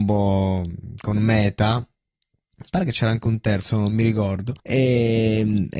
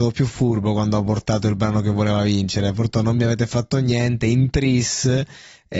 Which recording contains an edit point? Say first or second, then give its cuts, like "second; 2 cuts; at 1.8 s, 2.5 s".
first; 1 cut; at 4.6 s